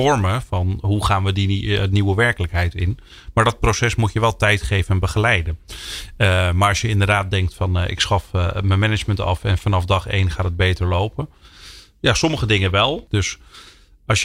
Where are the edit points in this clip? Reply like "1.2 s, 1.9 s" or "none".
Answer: 13.1 s